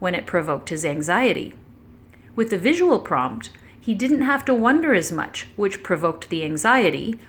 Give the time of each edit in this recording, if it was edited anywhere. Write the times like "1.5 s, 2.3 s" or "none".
none